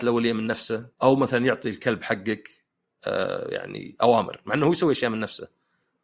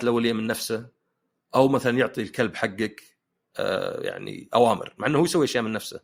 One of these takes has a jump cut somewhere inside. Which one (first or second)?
first